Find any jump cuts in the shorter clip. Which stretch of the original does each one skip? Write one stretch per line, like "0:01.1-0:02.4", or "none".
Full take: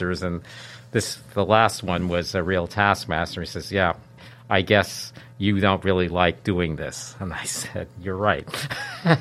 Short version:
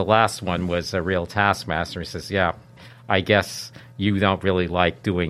none